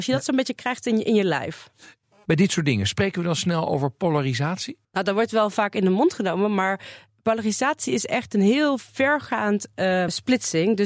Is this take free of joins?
yes; 0 cuts

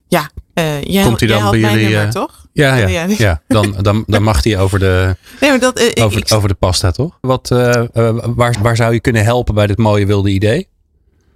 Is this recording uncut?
no; 2 cuts; at 7.2 s, 8.5 s

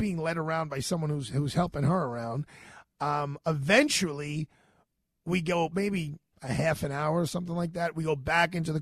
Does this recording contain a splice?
no; 0 cuts

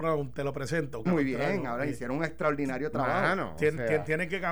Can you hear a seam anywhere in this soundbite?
yes; 1 cut; at 1.1 s

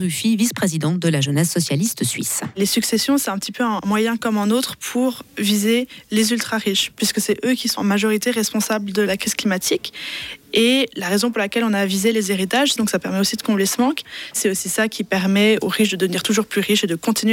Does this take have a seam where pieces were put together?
yes; 2 cuts; at 12.8 s, 14.3 s

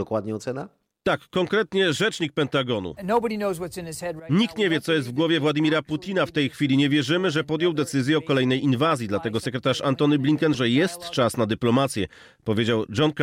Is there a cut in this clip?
yes; 1 cut; at 10.5 s

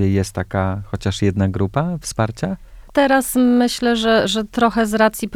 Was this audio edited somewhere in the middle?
yes; 1 cut; at 2.9 s

